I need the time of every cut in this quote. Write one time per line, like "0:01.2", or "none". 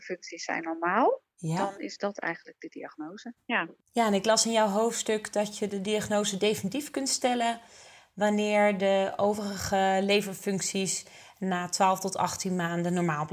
0:03.4

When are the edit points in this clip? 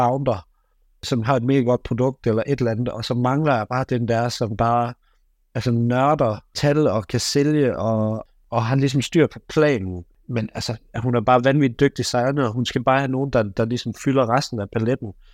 none

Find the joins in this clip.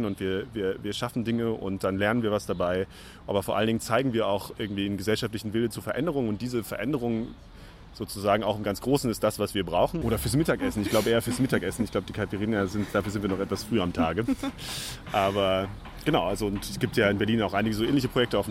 0:10.0

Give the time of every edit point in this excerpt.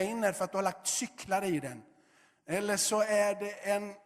none

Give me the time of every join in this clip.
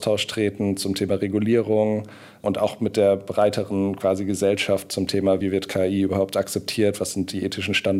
none

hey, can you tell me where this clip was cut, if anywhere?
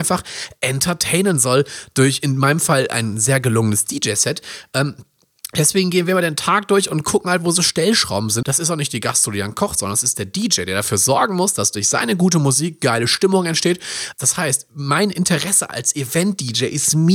0:08.4
0:14.1

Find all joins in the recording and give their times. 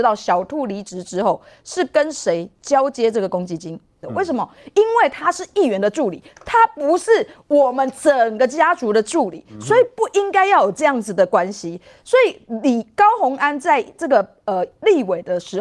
0:04.0

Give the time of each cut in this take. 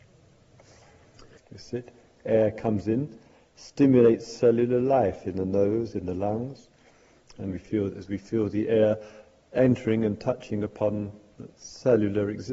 0:01.4
0:05.9

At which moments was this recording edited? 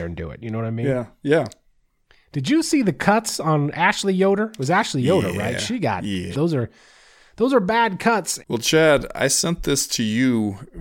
0:06.3
0:08.4

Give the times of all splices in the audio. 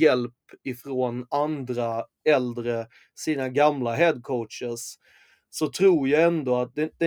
none

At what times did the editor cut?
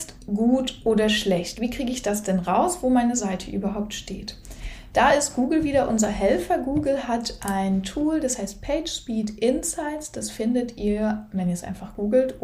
none

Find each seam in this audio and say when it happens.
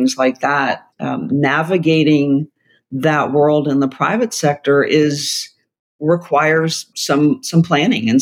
0:00.9
0:06.9

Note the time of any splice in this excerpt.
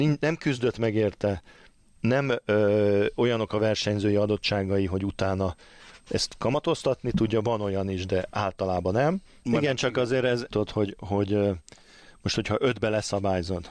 0:09.4
0:10.5

